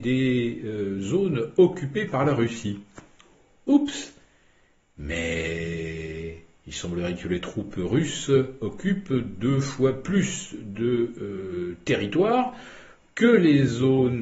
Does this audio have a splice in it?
no; 0 cuts

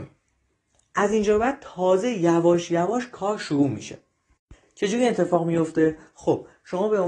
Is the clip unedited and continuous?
yes; 0 cuts

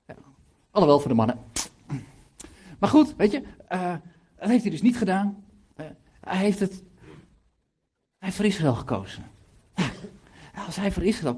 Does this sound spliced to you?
no; 0 cuts

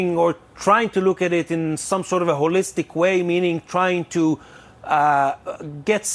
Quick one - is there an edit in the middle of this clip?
no; 0 cuts

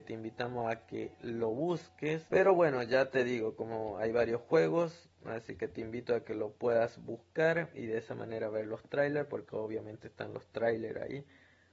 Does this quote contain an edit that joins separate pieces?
yes; 1 cut; at 2.3 s

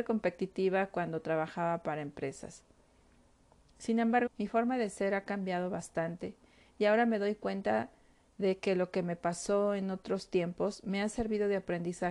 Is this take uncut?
no; 1 cut; at 4.3 s

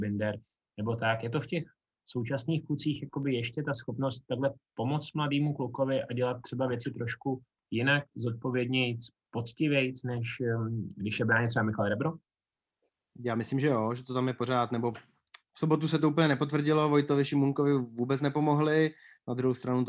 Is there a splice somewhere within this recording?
no; 0 cuts

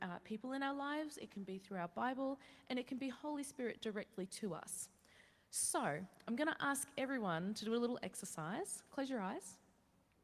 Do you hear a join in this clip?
no; 0 cuts

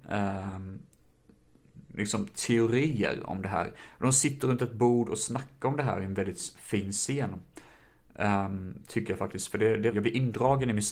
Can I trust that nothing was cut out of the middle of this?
no; 1 cut; at 9.9 s

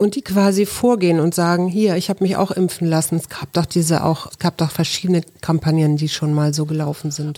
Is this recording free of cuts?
no; 1 cut; at 4.3 s

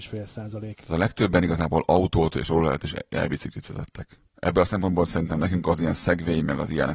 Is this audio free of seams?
no; 1 cut; at 4.3 s

